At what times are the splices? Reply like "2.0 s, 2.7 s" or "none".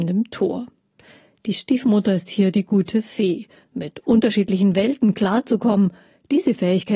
3.6 s